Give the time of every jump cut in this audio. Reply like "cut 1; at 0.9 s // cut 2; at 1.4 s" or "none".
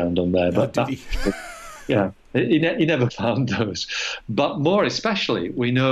cut 1; at 3.1 s // cut 2; at 4.2 s